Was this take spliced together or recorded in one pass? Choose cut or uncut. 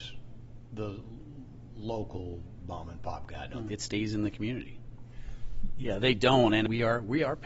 cut